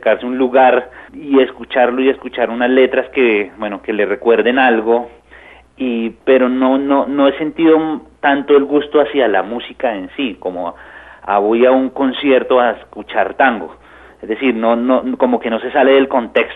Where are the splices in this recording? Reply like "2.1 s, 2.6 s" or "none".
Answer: 1.1 s